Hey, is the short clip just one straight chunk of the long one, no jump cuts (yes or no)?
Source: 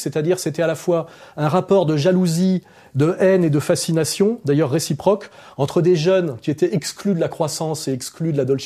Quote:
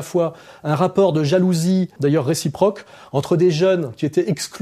no